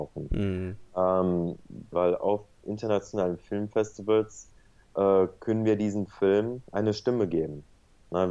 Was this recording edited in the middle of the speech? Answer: yes; 2 cuts; at 1.9 s, 6.7 s

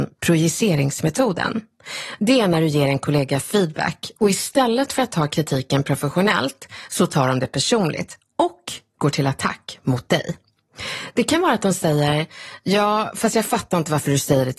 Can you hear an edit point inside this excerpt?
no; 0 cuts

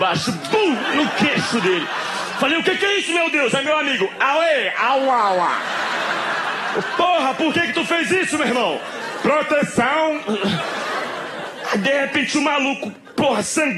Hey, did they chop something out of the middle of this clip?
no; 0 cuts

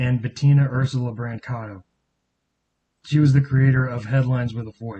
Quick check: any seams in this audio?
no; 0 cuts

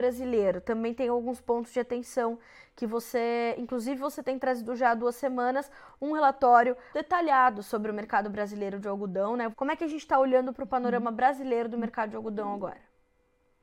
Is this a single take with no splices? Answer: no; 2 cuts; at 6.9 s, 9.5 s

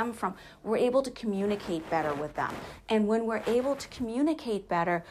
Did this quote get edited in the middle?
no; 0 cuts

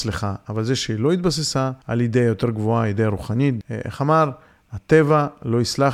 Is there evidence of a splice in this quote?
yes; 2 cuts; at 1.8 s, 3.6 s

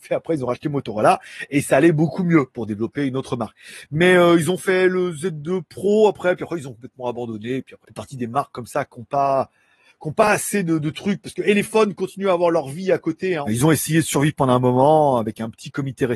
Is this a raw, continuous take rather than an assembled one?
no; 2 cuts; at 7.8 s, 13.5 s

